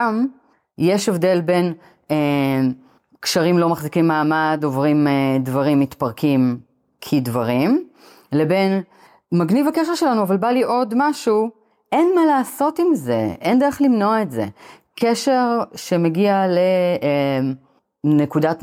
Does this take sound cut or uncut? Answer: uncut